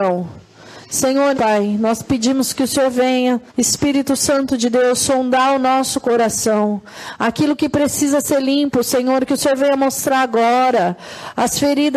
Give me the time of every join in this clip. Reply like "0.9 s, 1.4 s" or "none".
1.3 s, 3.5 s